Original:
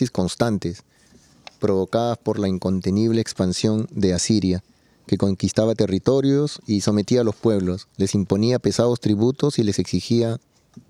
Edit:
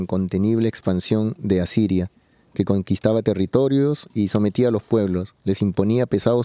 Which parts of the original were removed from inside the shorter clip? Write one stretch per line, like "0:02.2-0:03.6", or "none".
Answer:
none